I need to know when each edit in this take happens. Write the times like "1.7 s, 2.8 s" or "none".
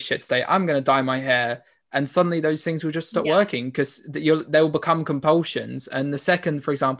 none

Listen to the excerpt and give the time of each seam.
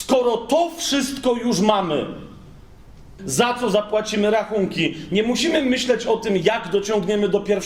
3.2 s

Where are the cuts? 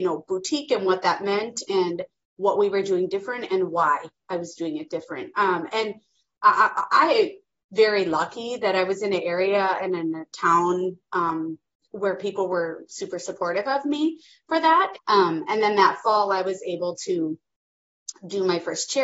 14.9 s

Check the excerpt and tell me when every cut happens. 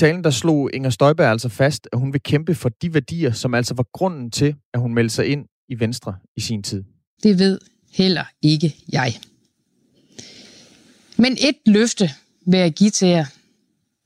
7.2 s

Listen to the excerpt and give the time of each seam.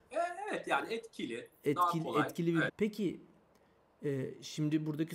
2.7 s

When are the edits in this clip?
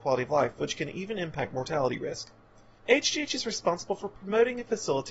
2.8 s

